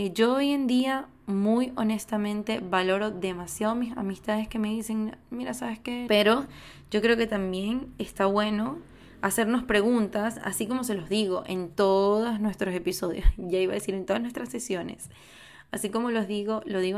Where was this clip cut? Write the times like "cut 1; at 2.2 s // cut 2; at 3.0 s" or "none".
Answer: cut 1; at 6.1 s